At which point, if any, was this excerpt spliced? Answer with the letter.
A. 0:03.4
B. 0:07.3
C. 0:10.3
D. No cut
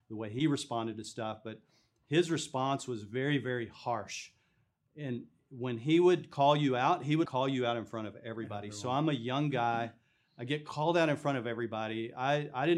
B